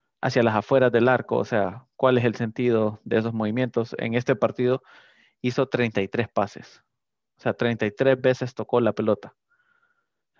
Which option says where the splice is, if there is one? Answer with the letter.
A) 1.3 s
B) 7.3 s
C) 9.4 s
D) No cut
D